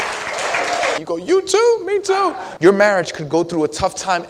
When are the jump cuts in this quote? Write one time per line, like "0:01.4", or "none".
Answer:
0:01.0
0:02.6

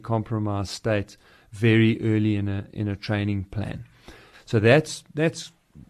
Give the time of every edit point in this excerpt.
0:04.3

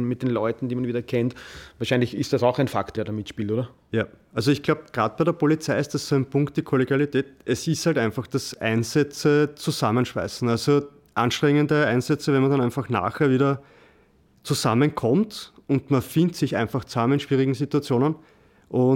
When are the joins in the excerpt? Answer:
0:02.9

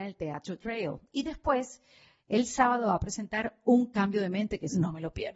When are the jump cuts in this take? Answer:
0:01.1

